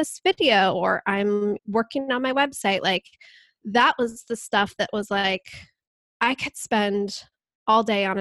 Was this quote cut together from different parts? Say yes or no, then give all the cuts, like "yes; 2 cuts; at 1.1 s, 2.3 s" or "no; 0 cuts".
yes; 1 cut; at 1.6 s